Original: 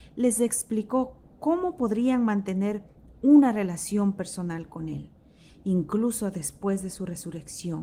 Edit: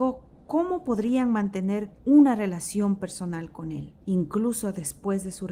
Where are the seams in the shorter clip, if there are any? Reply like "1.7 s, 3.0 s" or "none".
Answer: 2.0 s, 4.0 s